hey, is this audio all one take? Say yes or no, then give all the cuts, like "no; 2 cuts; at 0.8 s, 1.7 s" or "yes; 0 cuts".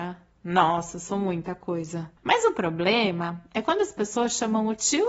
no; 1 cut; at 2.2 s